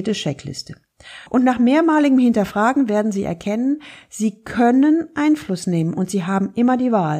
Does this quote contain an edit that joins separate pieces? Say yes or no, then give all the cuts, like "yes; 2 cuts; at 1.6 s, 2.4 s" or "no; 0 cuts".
yes; 1 cut; at 1.3 s